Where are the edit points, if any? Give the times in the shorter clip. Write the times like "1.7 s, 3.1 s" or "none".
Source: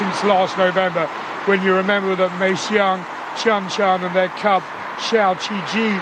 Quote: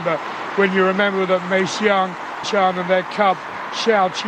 2.4 s